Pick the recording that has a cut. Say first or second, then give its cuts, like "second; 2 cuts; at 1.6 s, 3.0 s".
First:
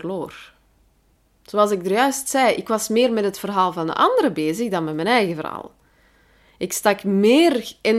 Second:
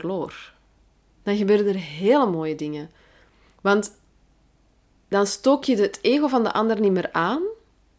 second; 1 cut; at 1.1 s